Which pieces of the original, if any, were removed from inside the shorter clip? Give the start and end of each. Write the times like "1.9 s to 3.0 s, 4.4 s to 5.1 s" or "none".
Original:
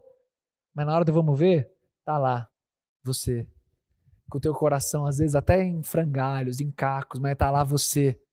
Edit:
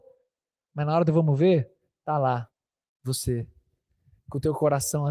none